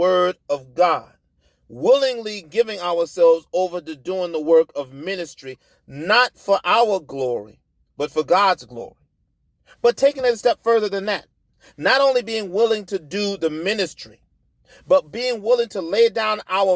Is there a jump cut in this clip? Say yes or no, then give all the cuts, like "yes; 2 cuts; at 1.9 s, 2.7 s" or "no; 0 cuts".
no; 0 cuts